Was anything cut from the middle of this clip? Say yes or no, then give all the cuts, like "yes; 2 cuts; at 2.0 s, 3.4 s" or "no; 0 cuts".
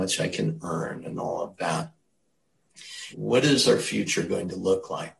yes; 1 cut; at 3.1 s